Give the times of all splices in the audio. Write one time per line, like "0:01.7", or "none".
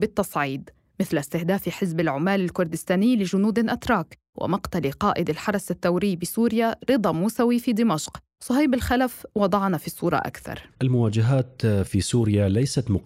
0:10.7